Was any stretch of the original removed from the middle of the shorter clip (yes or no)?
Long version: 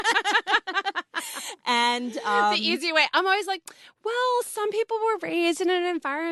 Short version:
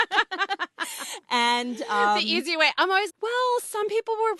yes